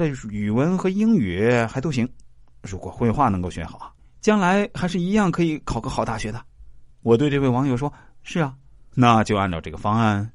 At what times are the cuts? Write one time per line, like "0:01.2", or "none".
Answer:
0:06.9